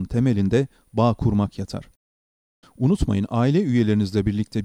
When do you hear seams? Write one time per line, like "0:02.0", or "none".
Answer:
0:02.6